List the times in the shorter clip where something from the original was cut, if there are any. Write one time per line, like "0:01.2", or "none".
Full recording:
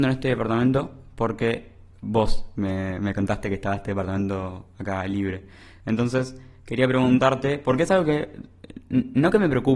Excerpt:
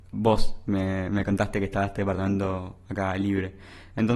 none